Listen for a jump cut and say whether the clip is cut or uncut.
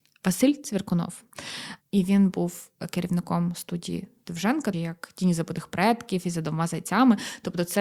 cut